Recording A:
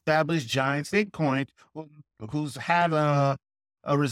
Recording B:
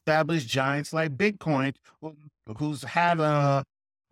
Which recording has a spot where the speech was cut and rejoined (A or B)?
A